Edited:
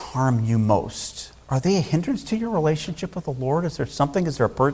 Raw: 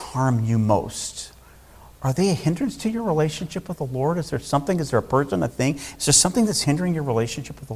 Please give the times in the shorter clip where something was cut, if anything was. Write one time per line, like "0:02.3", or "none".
0:01.4

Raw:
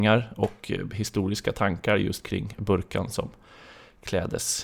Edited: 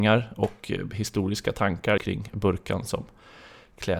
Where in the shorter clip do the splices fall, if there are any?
0:02.0

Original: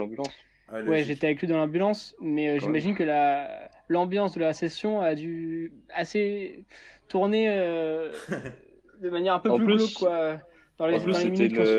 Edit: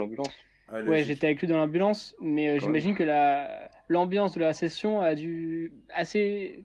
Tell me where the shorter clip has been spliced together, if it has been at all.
none

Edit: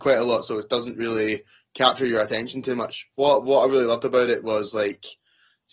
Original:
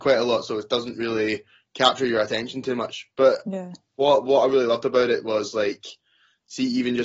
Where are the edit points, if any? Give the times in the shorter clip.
0:03.1

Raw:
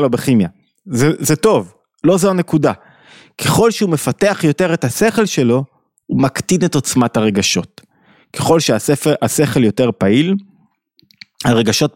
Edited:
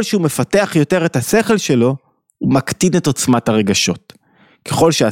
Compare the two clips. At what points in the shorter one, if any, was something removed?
none

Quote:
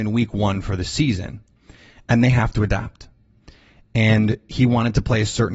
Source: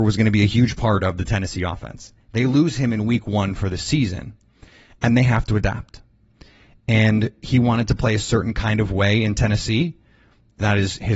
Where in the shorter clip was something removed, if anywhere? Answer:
none

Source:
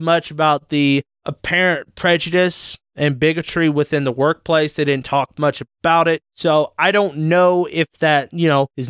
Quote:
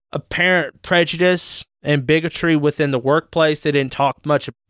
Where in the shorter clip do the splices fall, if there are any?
none

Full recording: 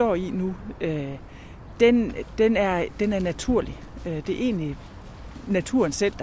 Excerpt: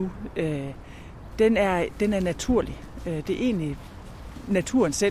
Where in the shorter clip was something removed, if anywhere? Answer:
0:01.3

